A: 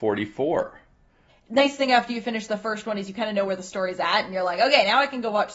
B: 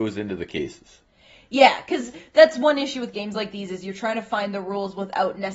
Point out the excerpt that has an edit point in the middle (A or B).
A